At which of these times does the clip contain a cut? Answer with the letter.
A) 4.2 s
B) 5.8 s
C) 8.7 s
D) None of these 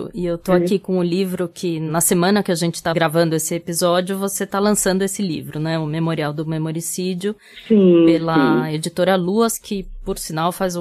D